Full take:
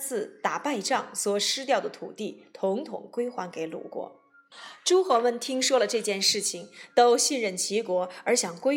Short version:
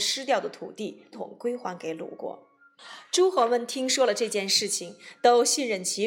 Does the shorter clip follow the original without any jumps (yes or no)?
no